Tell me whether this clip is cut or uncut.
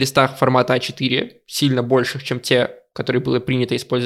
uncut